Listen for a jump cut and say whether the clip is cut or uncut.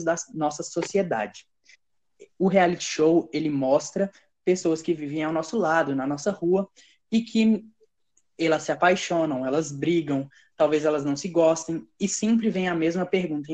cut